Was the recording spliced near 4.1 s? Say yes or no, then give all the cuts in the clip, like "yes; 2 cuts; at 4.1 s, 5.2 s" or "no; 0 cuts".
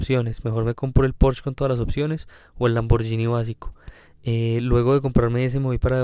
no; 0 cuts